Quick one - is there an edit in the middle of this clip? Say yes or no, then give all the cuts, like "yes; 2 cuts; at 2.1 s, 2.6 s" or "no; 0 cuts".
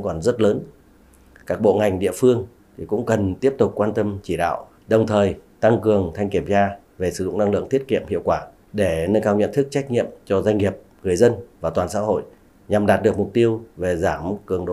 yes; 2 cuts; at 1.4 s, 4.7 s